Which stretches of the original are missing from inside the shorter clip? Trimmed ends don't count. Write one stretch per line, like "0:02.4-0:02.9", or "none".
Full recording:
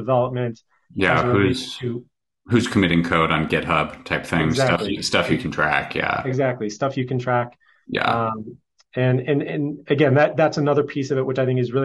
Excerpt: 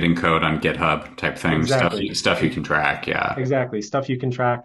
none